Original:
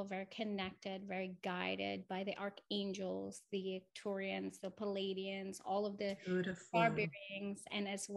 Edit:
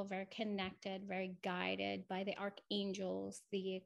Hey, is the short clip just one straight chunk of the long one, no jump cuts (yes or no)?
yes